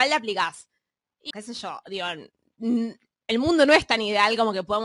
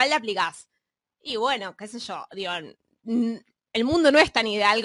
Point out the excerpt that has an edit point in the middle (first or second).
first